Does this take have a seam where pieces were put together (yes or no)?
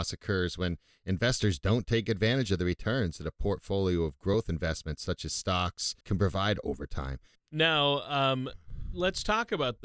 yes